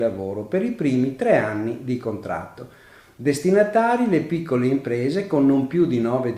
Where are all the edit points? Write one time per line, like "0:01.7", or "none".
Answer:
none